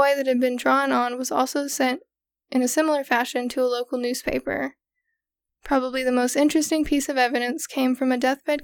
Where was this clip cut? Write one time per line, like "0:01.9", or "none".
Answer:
0:05.5

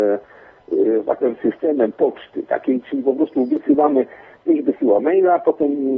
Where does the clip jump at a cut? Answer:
none

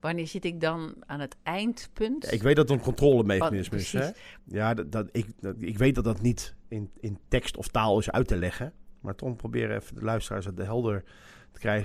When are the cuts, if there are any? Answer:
0:04.4

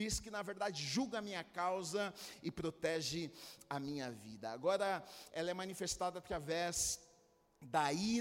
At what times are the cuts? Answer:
0:05.3

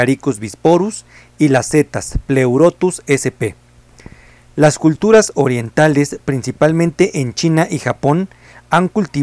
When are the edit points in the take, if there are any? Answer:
none

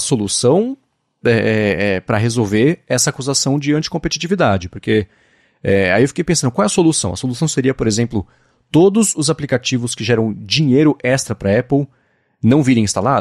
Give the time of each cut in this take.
none

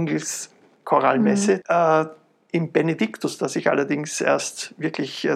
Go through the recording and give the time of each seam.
0:01.6

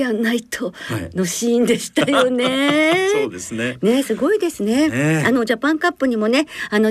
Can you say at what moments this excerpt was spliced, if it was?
none

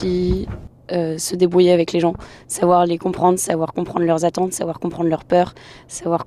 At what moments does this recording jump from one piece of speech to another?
none

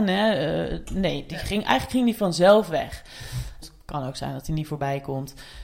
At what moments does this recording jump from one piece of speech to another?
0:01.6
0:03.6

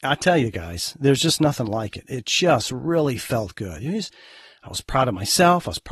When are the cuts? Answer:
none

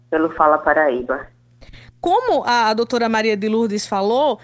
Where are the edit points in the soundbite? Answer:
none

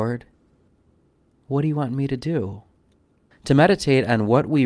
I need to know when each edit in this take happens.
0:03.3

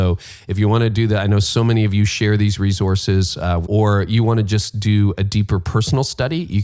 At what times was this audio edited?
0:03.6

